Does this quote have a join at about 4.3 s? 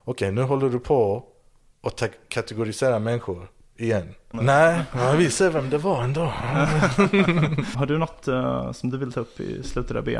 yes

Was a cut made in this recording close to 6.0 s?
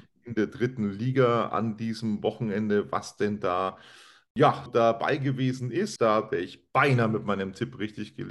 yes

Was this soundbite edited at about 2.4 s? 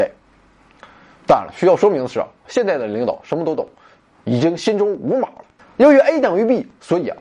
yes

